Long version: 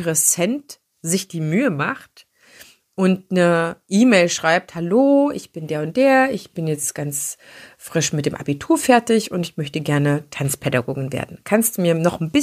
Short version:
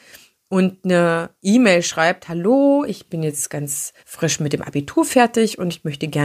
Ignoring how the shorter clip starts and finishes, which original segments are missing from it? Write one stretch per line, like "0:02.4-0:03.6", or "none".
0:05.3-0:06.3
0:07.4-0:07.7